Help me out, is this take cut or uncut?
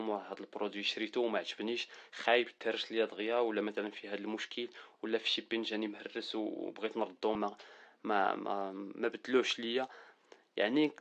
cut